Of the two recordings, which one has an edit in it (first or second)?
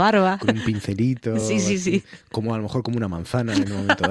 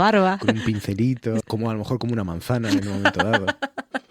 second